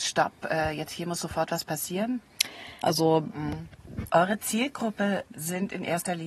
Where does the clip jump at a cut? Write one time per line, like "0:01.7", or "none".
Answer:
0:02.8
0:04.1